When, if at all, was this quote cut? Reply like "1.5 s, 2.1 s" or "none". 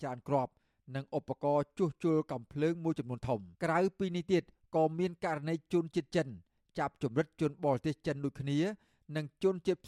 3.5 s